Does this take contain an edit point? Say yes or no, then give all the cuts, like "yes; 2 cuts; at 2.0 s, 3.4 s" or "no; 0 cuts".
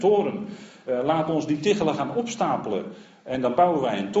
no; 0 cuts